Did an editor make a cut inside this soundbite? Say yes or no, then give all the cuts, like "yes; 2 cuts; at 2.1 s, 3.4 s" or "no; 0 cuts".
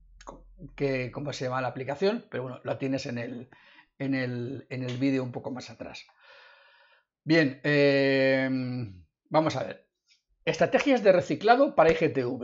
no; 0 cuts